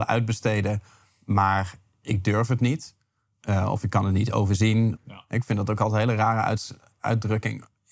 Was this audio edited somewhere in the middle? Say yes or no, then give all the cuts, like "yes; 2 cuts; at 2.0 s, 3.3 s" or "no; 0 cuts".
yes; 1 cut; at 5.0 s